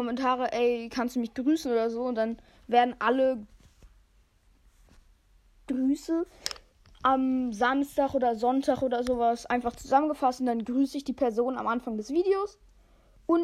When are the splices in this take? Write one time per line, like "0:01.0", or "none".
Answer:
none